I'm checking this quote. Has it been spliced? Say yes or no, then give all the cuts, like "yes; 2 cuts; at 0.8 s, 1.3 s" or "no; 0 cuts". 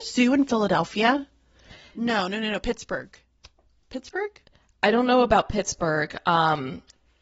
no; 0 cuts